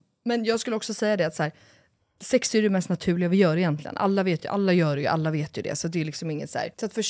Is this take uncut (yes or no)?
yes